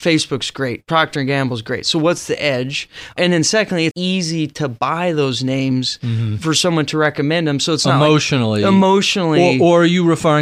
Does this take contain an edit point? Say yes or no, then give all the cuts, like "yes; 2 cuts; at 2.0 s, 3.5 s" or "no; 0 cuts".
yes; 1 cut; at 3.9 s